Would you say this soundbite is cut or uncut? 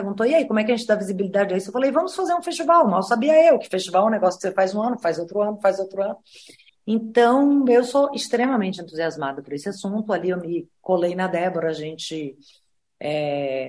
cut